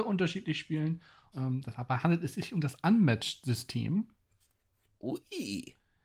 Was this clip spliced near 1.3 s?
yes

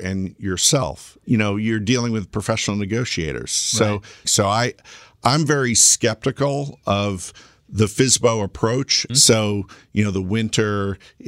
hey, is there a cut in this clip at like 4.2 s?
yes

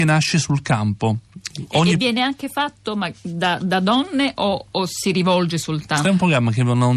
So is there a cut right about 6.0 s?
yes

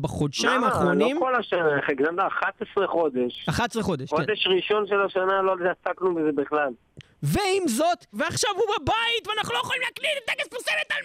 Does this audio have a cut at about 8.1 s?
yes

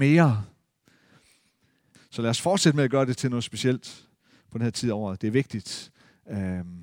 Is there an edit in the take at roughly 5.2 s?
no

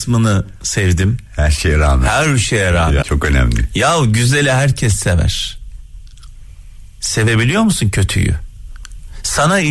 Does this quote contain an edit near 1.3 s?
no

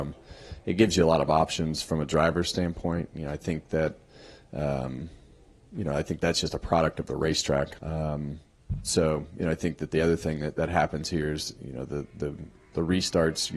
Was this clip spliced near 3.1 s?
no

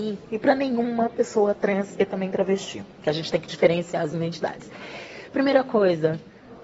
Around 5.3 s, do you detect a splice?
no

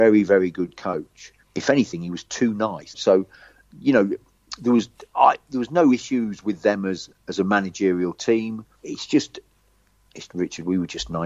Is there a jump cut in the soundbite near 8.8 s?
yes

